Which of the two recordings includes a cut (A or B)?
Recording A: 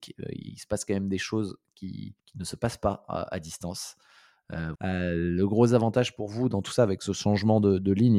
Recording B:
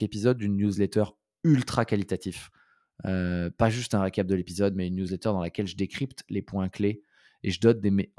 A